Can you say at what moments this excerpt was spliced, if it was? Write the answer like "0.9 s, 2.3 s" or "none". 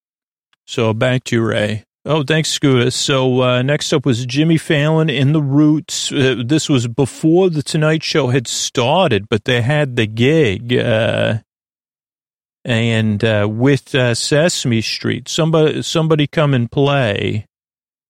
1.9 s